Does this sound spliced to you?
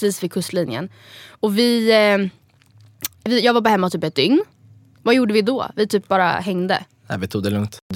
yes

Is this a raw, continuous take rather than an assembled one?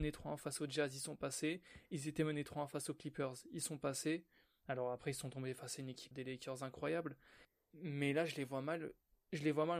no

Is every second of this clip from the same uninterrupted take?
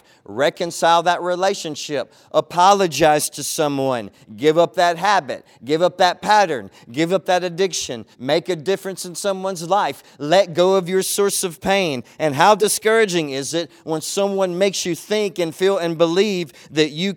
no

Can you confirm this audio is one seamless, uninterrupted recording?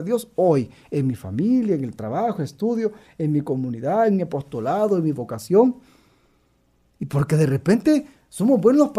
yes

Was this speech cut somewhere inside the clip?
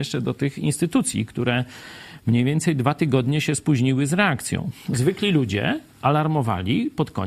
no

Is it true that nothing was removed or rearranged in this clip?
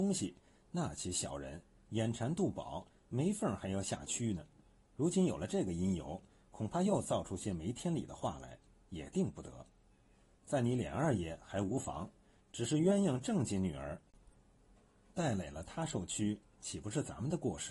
yes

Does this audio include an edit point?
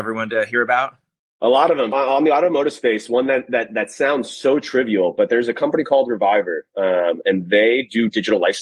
yes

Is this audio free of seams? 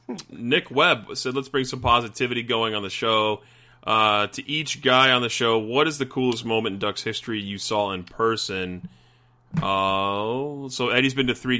yes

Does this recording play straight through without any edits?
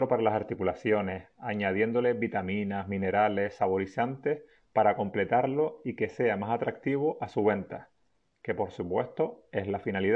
yes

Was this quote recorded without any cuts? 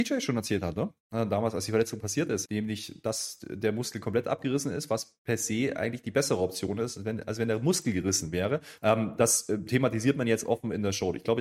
no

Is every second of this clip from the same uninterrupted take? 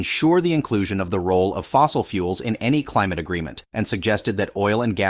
no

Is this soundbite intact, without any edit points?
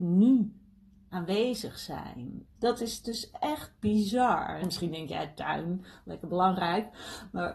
no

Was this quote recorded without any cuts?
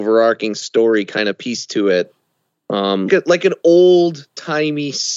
no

